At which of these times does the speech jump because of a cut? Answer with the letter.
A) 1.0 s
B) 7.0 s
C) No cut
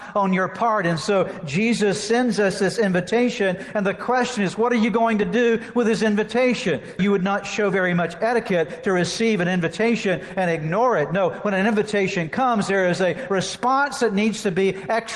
C